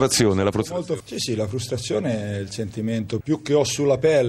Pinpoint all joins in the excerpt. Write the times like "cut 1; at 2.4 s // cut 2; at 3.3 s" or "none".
cut 1; at 1.0 s // cut 2; at 3.2 s